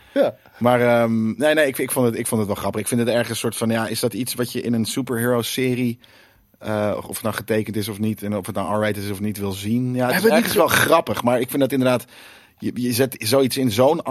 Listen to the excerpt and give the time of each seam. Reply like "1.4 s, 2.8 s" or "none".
none